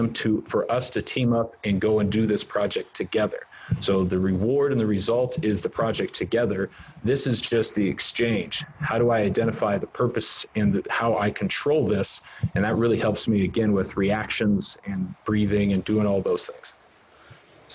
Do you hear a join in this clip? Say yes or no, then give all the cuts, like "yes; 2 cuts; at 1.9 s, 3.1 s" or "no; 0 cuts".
no; 0 cuts